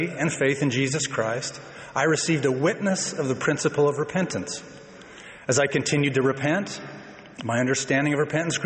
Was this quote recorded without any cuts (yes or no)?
yes